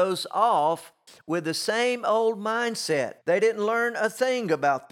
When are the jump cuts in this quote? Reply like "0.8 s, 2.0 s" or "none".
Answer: 3.2 s